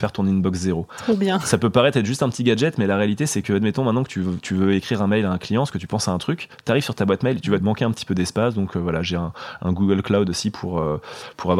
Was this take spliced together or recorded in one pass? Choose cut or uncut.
cut